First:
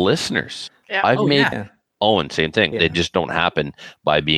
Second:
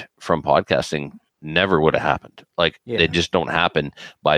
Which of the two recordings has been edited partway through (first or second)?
first